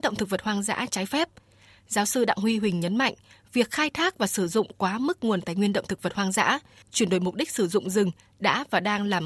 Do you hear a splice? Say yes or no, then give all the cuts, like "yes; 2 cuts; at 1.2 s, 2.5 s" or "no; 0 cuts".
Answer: yes; 1 cut; at 6.8 s